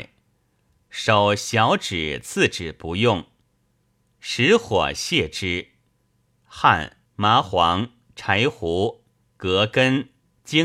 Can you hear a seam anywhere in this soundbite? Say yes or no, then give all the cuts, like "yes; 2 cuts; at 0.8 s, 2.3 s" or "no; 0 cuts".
yes; 1 cut; at 7.1 s